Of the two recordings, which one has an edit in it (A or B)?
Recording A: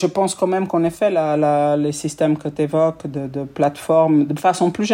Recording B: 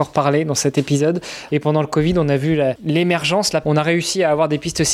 B